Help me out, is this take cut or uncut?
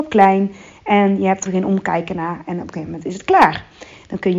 cut